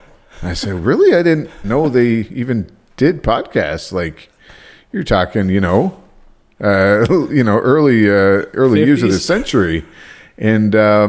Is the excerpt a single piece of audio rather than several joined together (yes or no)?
yes